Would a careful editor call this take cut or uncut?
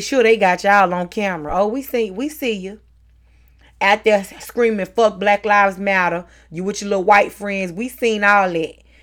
uncut